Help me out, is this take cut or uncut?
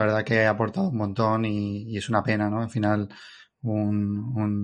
uncut